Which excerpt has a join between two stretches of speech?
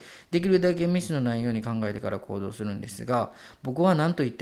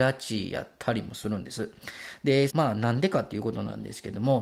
second; 1 cut; at 2.5 s

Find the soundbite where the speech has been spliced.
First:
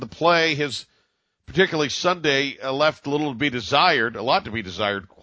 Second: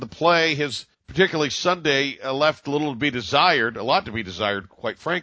second; 1 cut; at 0.9 s

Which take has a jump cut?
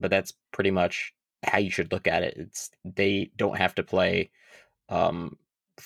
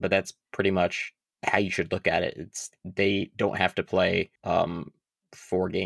second; 1 cut; at 4.4 s

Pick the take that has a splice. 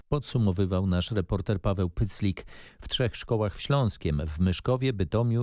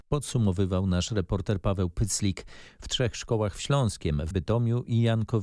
second; 1 cut; at 4.3 s

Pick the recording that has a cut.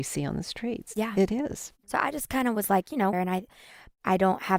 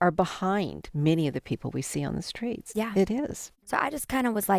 first; 1 cut; at 3.1 s

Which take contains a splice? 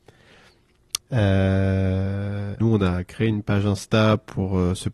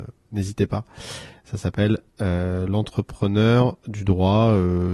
first; 2 cuts; at 1.0 s, 2.6 s

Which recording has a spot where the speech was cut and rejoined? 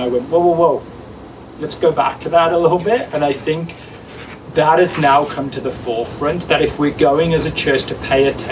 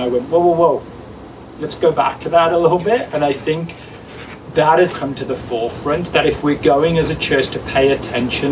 second; 1 cut; at 4.9 s

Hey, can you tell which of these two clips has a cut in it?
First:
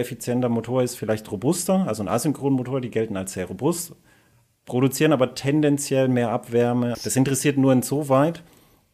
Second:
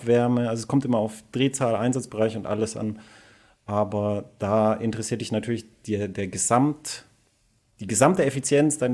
first; 1 cut; at 6.9 s

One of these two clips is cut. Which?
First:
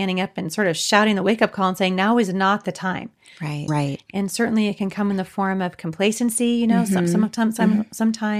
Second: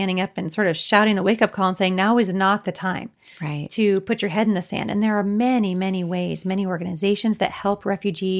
first; 1 cut; at 3.7 s

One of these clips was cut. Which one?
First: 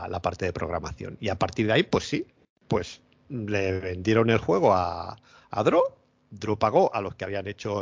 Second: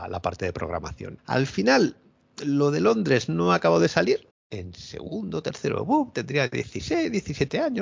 second; 2 cuts; at 1.2 s, 4.3 s

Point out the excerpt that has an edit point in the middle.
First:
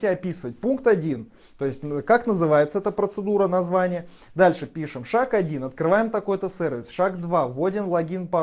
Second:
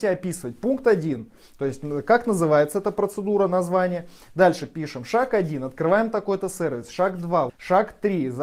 second; 1 cut; at 7.5 s

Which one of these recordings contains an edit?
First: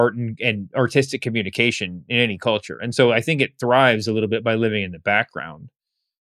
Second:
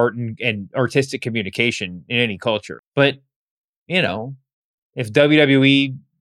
second; 1 cut; at 2.8 s

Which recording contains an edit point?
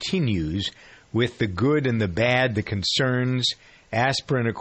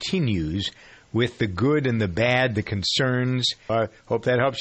second; 1 cut; at 3.7 s

